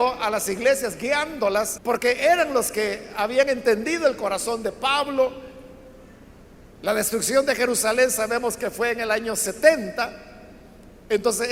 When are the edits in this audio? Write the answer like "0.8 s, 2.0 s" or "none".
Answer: 1.8 s, 6.7 s

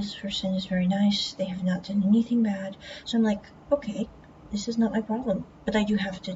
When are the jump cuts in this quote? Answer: 3.0 s

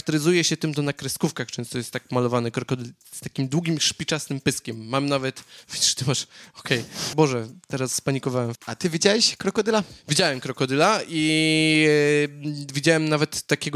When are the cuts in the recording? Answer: 7.1 s, 8.5 s

